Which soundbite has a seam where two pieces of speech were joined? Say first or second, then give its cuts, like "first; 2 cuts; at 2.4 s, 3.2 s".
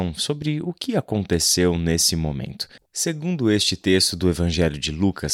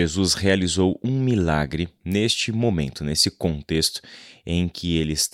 first; 1 cut; at 2.8 s